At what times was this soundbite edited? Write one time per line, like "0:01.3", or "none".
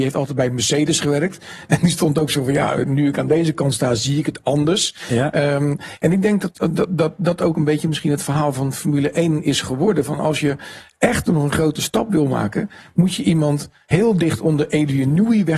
none